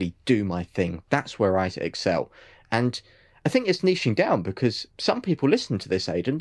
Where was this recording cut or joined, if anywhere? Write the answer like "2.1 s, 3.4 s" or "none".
none